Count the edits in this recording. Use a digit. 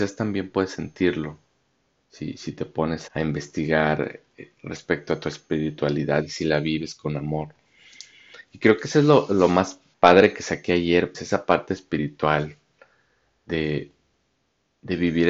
3